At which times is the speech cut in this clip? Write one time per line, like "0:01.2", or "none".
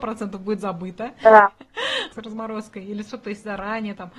none

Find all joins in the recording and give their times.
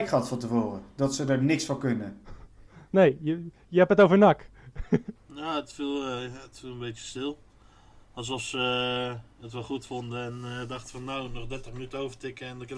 0:05.2

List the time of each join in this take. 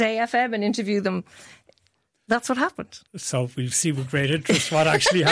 0:03.1

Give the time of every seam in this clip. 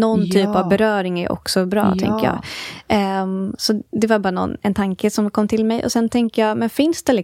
none

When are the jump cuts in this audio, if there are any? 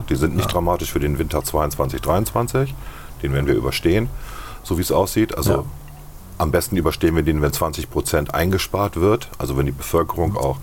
none

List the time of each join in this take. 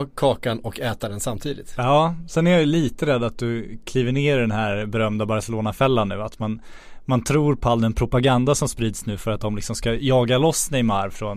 none

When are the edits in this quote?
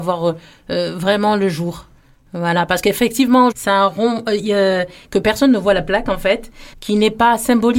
0:03.5
0:05.0
0:06.7

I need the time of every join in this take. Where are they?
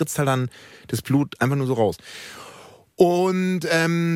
none

